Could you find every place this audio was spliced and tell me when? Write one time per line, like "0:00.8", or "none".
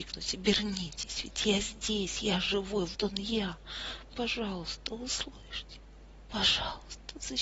0:02.9